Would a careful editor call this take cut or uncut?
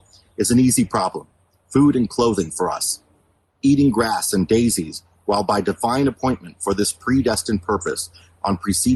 uncut